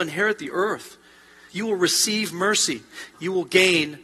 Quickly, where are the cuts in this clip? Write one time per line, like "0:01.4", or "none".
0:03.1